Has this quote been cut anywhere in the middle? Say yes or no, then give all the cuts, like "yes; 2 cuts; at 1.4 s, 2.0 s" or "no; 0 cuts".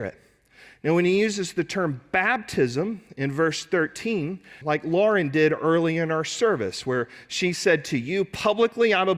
yes; 1 cut; at 4.6 s